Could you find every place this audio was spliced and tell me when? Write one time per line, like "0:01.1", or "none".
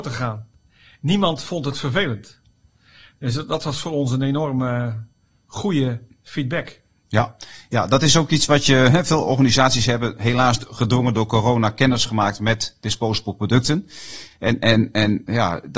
none